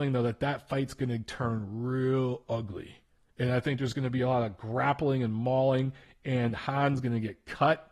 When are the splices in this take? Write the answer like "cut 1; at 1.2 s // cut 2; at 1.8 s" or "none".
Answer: none